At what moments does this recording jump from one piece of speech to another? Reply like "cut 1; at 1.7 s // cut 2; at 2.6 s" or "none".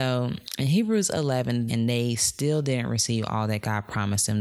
cut 1; at 1.7 s